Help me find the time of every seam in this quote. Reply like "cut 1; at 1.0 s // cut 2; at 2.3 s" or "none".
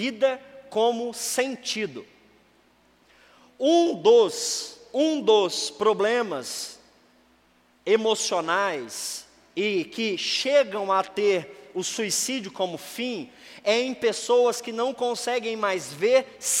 none